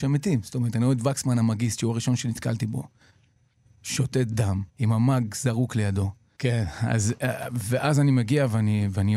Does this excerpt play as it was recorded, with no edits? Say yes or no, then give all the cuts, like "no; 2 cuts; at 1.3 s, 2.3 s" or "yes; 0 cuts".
no; 2 cuts; at 4.7 s, 6.4 s